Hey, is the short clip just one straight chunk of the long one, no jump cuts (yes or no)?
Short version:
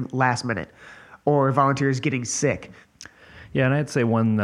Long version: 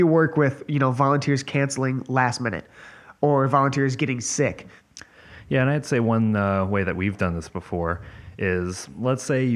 yes